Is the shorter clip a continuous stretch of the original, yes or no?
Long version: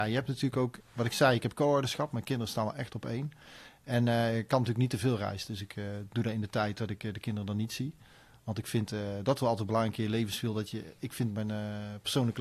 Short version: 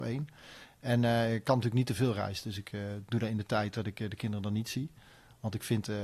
yes